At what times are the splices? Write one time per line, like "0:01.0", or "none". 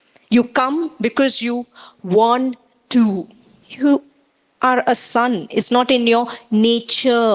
0:03.6